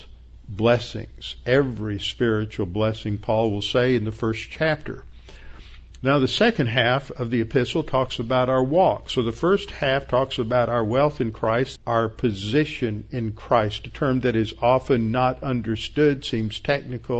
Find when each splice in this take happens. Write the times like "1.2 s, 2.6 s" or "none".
11.8 s

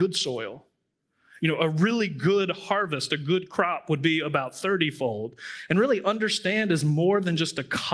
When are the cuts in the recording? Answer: 1.4 s, 5.7 s

